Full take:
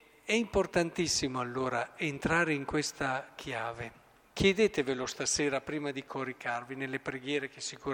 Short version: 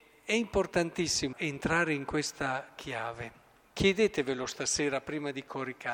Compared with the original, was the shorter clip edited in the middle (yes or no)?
yes